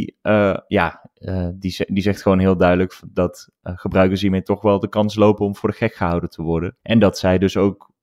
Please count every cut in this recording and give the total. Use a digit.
1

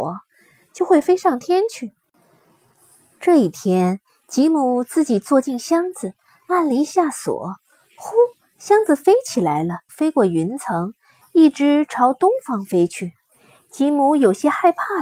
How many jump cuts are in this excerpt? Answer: 2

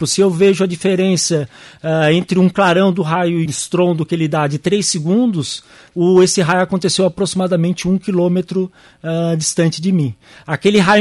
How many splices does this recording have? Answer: 2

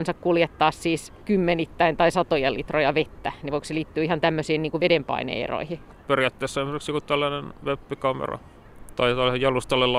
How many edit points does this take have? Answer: 1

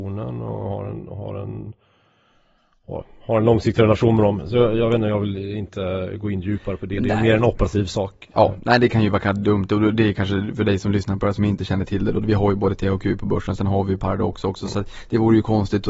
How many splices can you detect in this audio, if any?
0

